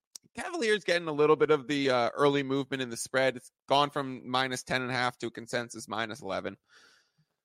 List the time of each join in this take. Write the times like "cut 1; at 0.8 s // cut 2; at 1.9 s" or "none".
none

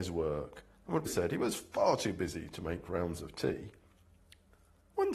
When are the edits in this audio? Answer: cut 1; at 1.1 s

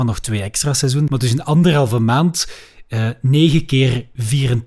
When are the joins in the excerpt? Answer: cut 1; at 1.1 s

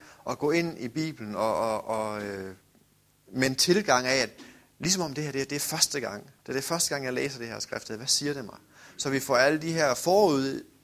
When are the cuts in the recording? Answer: cut 1; at 6.4 s

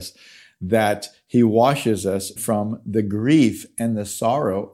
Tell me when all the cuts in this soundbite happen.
cut 1; at 2.4 s

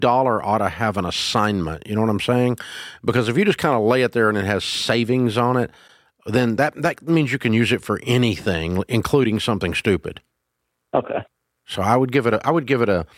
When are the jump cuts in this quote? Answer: none

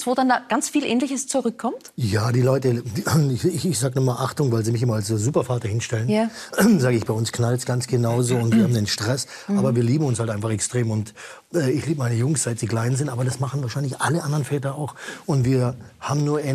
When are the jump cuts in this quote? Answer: cut 1; at 7.1 s

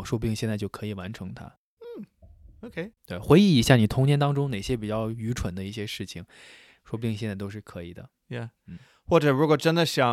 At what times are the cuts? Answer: none

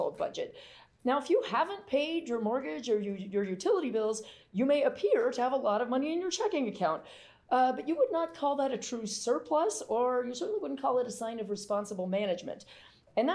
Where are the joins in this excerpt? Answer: none

